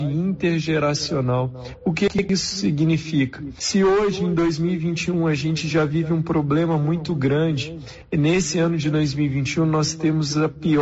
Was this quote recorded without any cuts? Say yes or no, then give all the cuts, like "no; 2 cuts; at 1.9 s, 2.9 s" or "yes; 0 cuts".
yes; 0 cuts